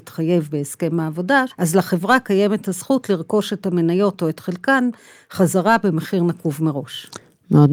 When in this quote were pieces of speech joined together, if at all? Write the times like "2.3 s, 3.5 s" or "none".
1.5 s